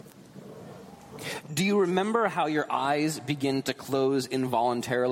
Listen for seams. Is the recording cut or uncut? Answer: cut